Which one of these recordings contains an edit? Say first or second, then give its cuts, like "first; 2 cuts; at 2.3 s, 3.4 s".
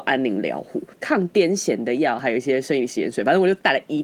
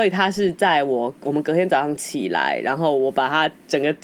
first; 1 cut; at 0.9 s